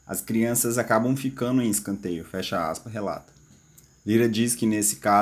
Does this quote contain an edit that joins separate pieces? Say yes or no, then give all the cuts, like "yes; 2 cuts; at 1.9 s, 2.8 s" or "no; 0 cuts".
no; 0 cuts